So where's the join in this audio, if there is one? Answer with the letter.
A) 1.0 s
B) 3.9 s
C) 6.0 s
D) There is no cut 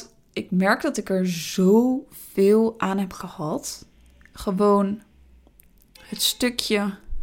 D